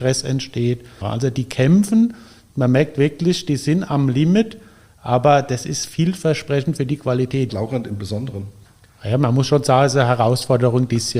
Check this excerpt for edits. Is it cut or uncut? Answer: cut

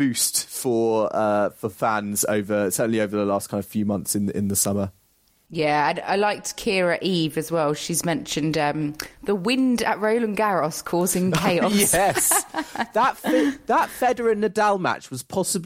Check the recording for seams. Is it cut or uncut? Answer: uncut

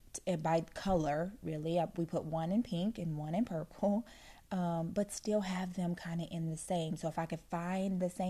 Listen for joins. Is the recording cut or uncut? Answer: uncut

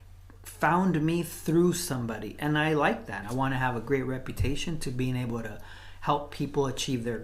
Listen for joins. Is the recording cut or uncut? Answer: cut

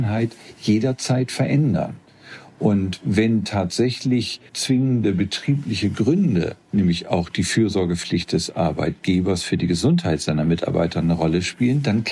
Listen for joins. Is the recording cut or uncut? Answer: uncut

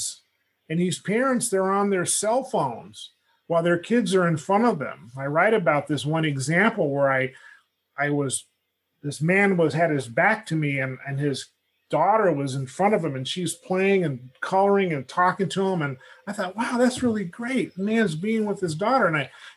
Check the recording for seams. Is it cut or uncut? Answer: uncut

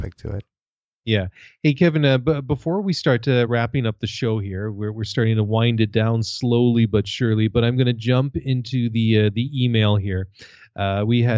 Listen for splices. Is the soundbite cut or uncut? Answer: uncut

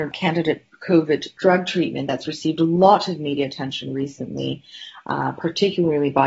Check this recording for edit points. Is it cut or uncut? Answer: uncut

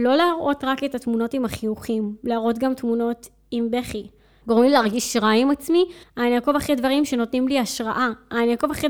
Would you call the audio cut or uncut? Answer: cut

